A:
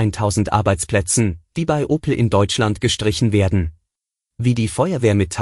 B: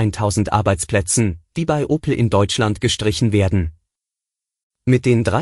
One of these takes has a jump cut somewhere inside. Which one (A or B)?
A